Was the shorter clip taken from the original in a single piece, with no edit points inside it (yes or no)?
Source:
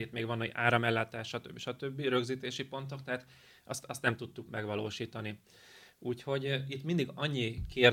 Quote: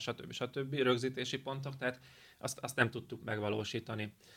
yes